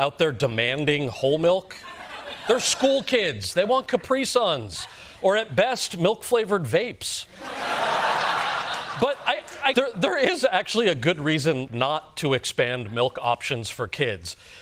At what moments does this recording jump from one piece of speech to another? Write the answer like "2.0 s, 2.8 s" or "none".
9.7 s, 11.7 s